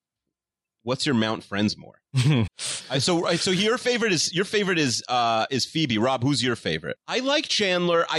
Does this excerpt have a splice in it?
yes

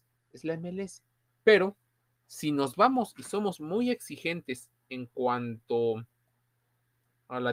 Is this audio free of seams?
no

